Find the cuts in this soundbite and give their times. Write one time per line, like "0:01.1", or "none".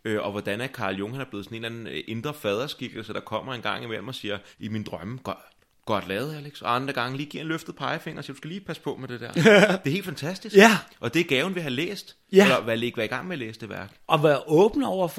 0:04.5